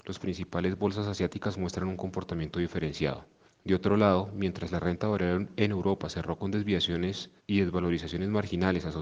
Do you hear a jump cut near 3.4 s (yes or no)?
yes